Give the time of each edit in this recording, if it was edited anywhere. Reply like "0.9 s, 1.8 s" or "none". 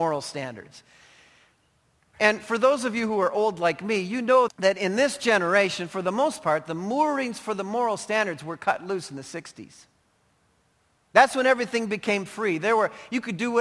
4.5 s